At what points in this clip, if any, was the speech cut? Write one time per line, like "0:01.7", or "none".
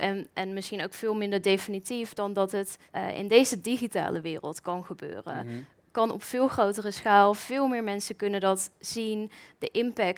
0:02.9